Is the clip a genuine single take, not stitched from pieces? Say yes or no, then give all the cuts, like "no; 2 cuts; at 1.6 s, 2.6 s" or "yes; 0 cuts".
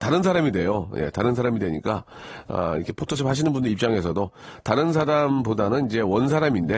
yes; 0 cuts